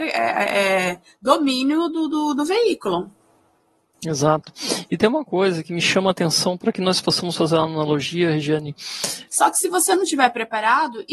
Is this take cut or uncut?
cut